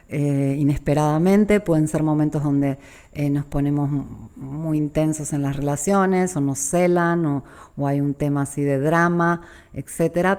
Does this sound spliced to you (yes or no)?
no